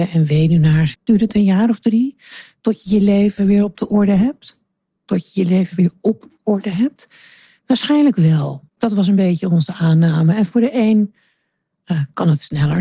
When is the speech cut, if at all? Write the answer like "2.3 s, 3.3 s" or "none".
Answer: 0.9 s, 8.7 s